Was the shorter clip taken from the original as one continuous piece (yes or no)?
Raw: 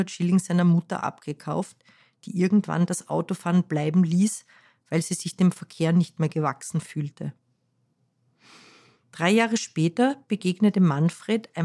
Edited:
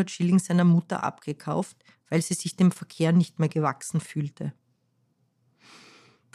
no